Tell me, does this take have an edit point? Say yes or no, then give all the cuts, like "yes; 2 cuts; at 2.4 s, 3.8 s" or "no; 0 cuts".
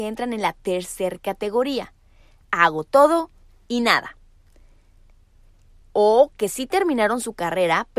yes; 1 cut; at 5.8 s